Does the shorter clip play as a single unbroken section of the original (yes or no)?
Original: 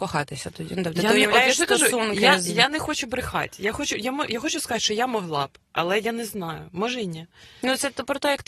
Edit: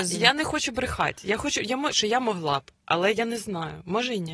no